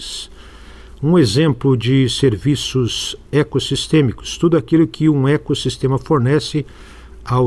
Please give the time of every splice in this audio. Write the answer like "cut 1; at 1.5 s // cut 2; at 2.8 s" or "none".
none